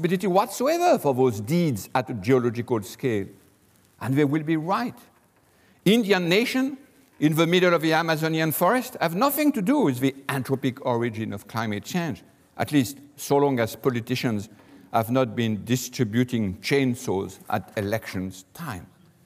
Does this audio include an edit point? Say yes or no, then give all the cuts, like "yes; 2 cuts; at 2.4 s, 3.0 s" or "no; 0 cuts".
no; 0 cuts